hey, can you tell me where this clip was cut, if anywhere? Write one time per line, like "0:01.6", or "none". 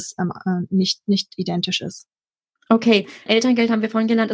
0:03.3